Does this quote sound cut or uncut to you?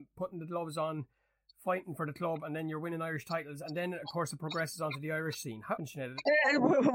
cut